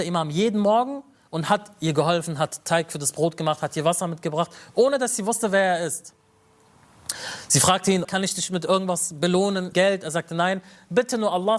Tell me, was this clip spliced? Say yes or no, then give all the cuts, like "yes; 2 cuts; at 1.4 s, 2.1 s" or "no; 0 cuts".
yes; 2 cuts; at 8.0 s, 9.7 s